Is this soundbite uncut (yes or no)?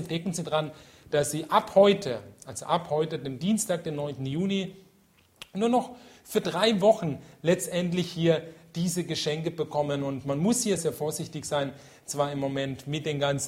no